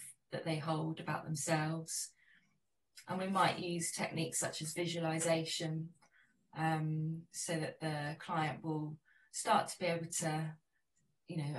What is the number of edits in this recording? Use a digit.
1